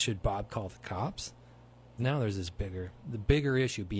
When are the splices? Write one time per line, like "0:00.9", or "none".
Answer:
0:02.0